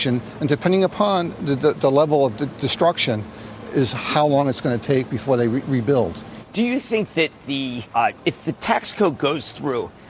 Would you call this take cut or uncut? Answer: cut